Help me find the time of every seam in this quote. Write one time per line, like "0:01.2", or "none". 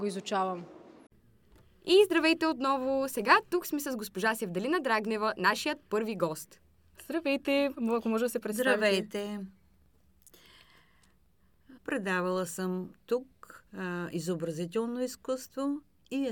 0:11.8
0:13.7